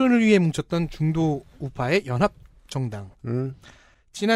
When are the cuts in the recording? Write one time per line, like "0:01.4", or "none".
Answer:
0:03.1